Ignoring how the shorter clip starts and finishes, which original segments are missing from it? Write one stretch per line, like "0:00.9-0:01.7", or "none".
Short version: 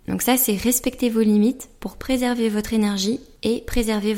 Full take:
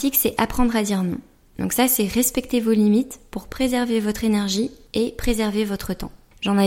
none